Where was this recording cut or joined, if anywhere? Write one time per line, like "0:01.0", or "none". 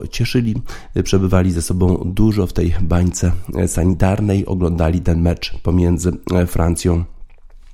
none